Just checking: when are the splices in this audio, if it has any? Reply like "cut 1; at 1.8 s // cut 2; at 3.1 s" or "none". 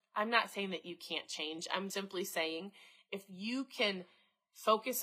cut 1; at 1.9 s